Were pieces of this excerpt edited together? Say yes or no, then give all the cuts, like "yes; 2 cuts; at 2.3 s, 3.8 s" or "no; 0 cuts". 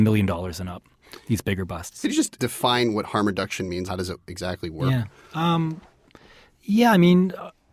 yes; 2 cuts; at 2.4 s, 3.9 s